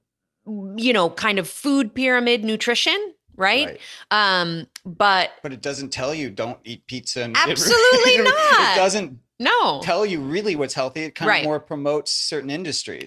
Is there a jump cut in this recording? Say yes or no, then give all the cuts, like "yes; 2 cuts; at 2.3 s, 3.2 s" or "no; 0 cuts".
no; 0 cuts